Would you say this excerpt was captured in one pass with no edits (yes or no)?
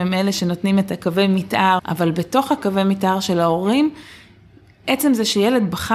no